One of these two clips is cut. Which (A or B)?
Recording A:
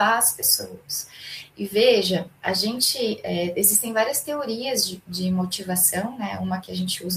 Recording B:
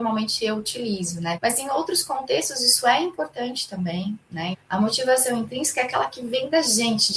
B